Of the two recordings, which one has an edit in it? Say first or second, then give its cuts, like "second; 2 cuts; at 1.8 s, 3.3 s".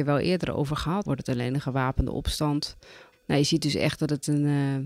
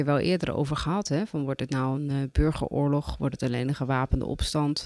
first; 2 cuts; at 1.0 s, 3.1 s